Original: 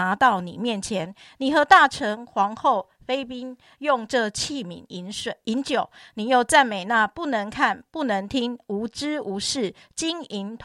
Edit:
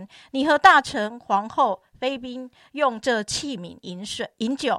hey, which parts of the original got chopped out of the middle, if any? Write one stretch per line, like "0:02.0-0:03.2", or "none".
none